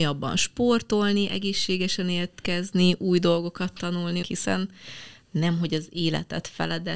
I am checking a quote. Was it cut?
yes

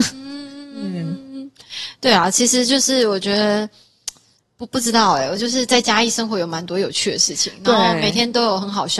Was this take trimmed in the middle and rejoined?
no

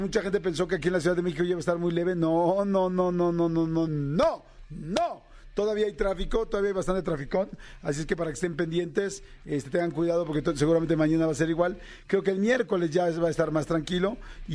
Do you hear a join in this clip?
no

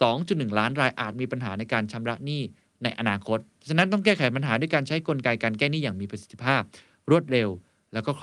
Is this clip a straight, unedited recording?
yes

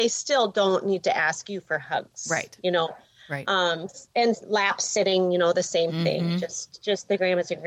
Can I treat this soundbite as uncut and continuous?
yes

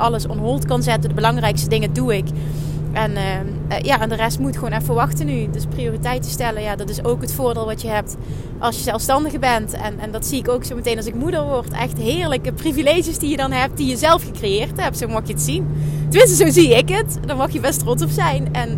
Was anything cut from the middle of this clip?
no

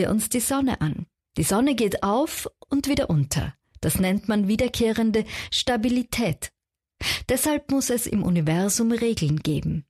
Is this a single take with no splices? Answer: yes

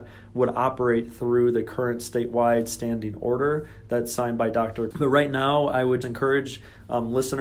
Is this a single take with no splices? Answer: no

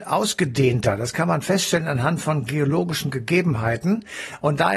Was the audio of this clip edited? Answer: no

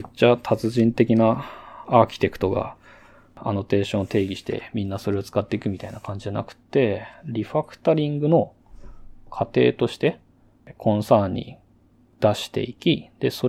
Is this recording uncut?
yes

